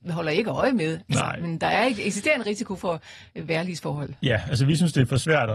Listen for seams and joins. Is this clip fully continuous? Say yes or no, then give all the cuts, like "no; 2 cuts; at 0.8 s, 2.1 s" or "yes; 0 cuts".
yes; 0 cuts